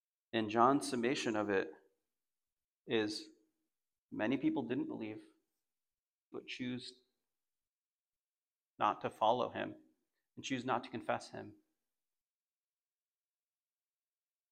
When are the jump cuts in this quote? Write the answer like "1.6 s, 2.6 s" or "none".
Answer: 6.3 s